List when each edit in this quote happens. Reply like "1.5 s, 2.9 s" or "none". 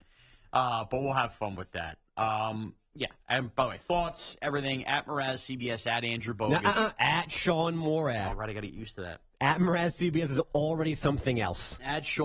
8.3 s